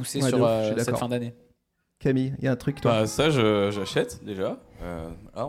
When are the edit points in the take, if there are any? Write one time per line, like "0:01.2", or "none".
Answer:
none